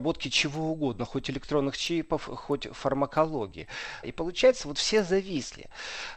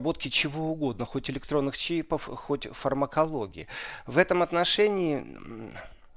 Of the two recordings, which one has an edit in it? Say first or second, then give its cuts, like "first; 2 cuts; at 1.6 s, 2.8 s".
first; 1 cut; at 4.0 s